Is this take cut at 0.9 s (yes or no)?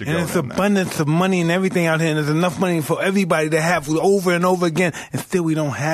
no